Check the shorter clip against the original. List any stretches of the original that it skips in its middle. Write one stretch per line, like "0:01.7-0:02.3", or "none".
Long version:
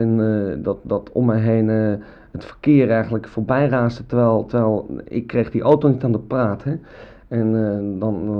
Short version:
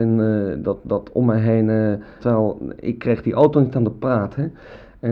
0:02.2-0:04.5